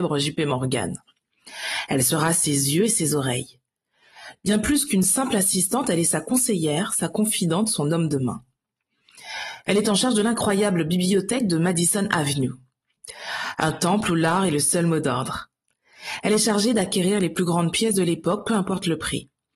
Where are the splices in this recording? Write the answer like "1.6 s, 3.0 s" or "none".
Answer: none